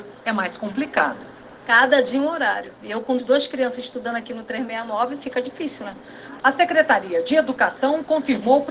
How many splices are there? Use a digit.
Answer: 2